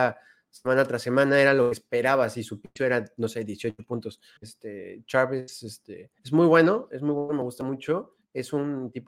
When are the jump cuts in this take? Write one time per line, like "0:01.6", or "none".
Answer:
0:04.4
0:06.2